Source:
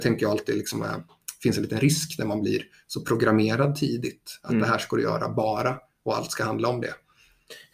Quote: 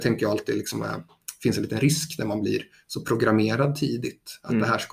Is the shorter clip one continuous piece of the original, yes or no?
yes